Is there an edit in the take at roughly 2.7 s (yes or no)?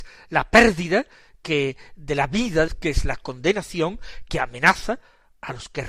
yes